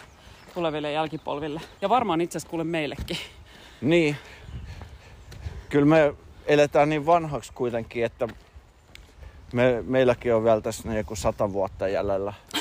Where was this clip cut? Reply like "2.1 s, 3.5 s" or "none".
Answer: 1.8 s